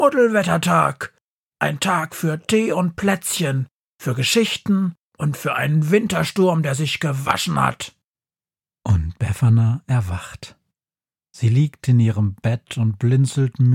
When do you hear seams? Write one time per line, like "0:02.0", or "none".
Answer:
none